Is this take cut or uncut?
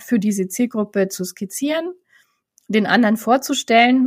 uncut